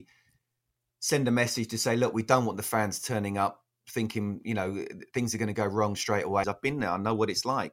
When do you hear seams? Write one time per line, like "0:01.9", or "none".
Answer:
0:06.4

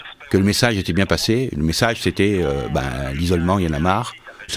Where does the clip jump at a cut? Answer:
none

